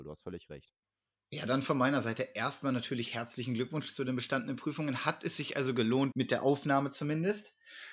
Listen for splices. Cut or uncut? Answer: cut